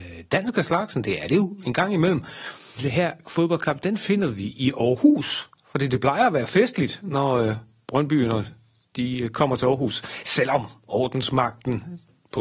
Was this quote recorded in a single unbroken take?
no; 1 cut; at 2.8 s

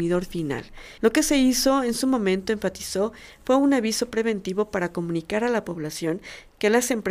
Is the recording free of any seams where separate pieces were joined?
no; 1 cut; at 1.0 s

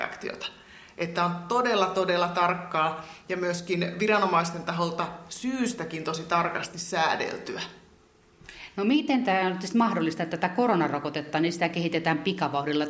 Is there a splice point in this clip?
no; 0 cuts

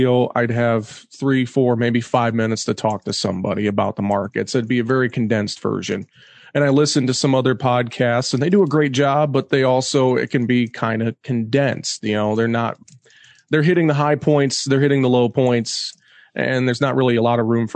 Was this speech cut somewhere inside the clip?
no; 0 cuts

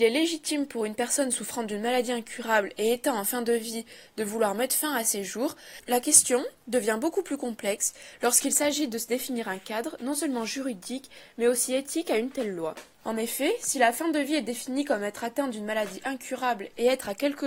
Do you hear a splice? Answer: no; 0 cuts

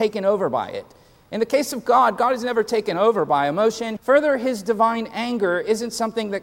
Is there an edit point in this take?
yes; 1 cut; at 4.0 s

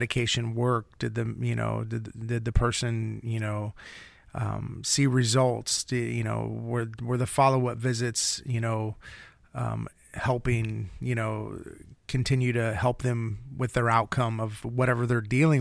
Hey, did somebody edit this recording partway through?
no; 0 cuts

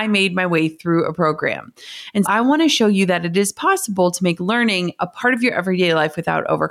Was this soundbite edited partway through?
yes; 1 cut; at 2.2 s

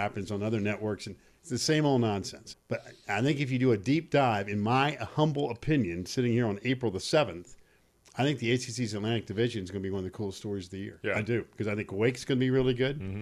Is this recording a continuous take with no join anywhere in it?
no; 1 cut; at 2.5 s

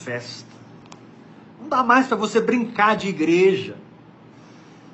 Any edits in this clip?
yes; 1 cut; at 1.5 s

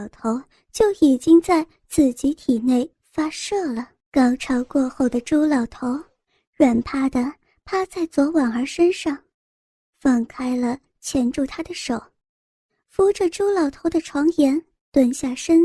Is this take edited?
yes; 3 cuts; at 4.0 s, 6.8 s, 12.8 s

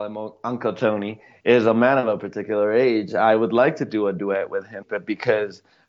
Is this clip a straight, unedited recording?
no; 1 cut; at 4.8 s

